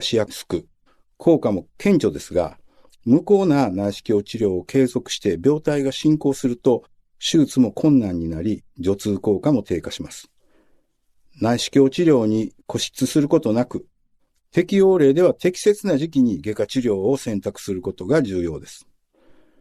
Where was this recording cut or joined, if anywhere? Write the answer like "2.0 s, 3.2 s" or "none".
none